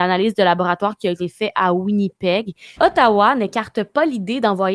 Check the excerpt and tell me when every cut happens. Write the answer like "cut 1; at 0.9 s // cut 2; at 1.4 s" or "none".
cut 1; at 2.8 s